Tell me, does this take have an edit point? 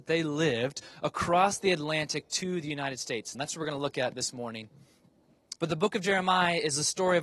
yes; 2 cuts; at 3.3 s, 5.6 s

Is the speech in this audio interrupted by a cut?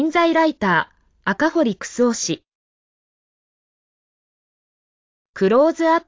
no; 0 cuts

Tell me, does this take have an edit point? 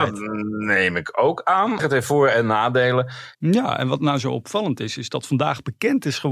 yes; 2 cuts; at 1.8 s, 3.3 s

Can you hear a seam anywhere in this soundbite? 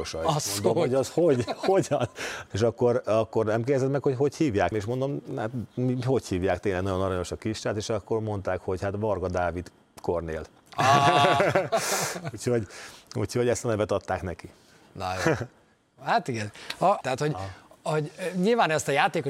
yes; 3 cuts; at 2.5 s, 4.7 s, 17.0 s

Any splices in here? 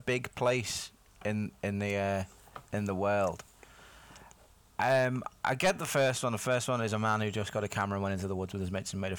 no; 0 cuts

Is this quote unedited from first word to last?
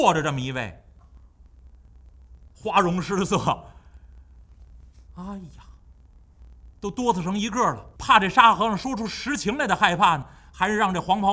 no; 2 cuts; at 5.1 s, 8.0 s

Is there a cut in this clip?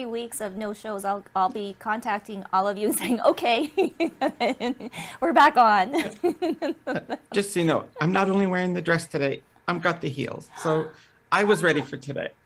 no; 0 cuts

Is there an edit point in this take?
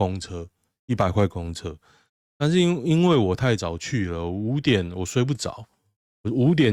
no; 0 cuts

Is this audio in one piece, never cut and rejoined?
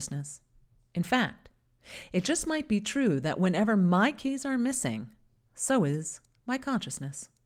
yes; 0 cuts

